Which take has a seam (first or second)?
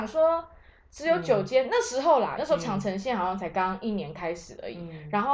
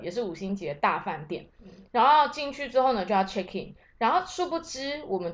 first